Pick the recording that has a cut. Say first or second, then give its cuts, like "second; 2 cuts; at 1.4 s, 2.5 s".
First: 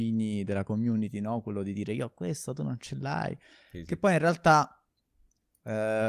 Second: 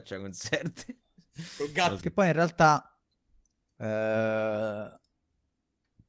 second; 1 cut; at 2.0 s